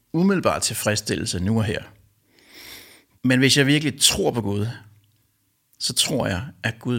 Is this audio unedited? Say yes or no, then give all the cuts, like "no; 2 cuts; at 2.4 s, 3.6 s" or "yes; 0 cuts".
no; 1 cut; at 3.2 s